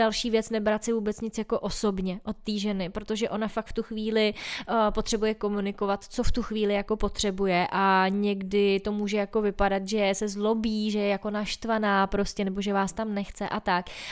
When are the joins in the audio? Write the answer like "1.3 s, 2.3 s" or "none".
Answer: none